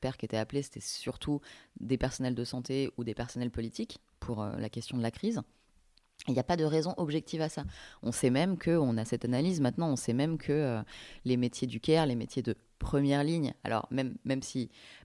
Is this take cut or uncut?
uncut